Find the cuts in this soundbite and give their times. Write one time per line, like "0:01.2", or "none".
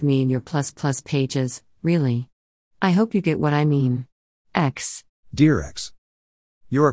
0:04.3